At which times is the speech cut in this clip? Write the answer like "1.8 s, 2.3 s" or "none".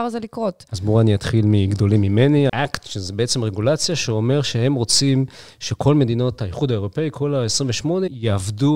2.5 s